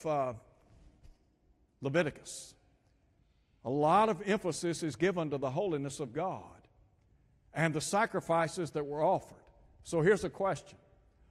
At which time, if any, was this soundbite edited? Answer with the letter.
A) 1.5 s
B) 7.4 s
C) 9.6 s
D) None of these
D